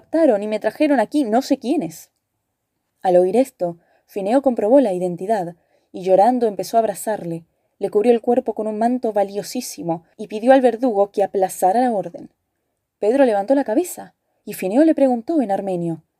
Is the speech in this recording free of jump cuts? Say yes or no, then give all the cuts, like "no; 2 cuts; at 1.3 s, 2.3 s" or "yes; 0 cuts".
no; 1 cut; at 12.9 s